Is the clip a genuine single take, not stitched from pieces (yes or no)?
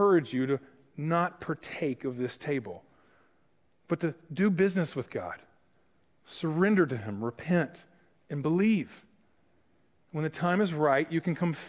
yes